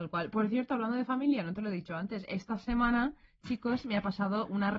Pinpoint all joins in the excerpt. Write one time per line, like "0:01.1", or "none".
none